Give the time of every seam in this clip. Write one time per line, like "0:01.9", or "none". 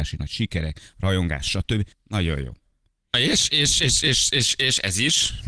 0:01.9